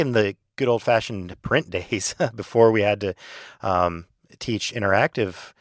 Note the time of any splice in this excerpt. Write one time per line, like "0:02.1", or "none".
none